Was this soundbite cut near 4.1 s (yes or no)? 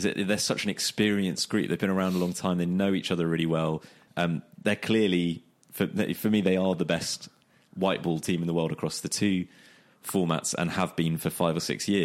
yes